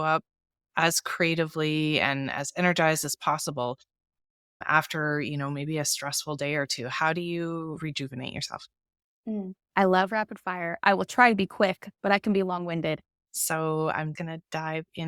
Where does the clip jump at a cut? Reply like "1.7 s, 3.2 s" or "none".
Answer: 13.1 s, 14.2 s